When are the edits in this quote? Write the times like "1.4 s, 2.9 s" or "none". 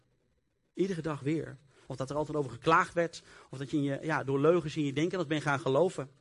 1.8 s